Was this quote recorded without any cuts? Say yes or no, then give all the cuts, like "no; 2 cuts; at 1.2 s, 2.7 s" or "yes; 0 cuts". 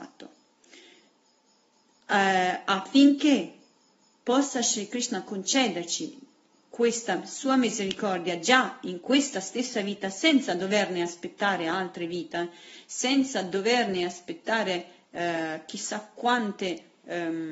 yes; 0 cuts